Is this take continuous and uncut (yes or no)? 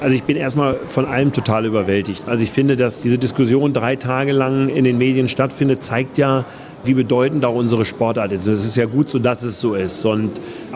yes